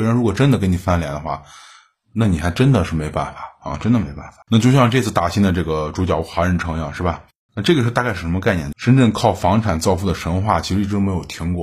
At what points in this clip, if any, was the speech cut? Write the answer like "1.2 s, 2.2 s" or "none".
4.4 s, 7.5 s, 8.7 s